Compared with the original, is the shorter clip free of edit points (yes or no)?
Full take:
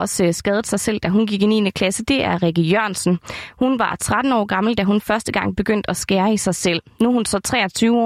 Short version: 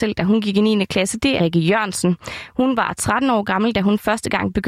no